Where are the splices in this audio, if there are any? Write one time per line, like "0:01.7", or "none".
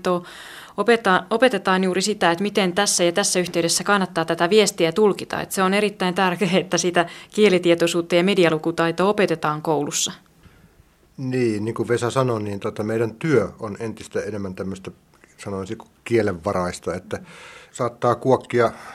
0:17.7